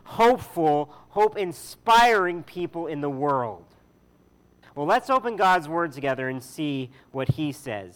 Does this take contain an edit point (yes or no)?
yes